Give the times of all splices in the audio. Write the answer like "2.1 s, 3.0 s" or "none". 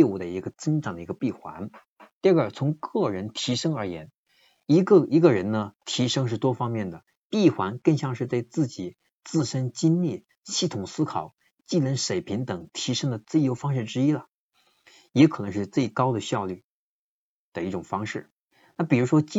2.2 s